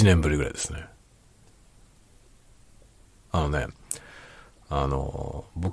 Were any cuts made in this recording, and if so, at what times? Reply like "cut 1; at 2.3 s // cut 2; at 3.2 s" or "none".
none